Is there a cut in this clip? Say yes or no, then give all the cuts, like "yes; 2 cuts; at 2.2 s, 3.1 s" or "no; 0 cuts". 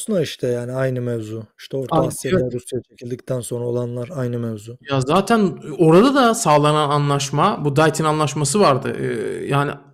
no; 0 cuts